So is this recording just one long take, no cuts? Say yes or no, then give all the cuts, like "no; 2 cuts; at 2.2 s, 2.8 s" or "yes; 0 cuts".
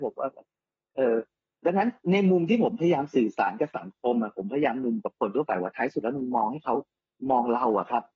yes; 0 cuts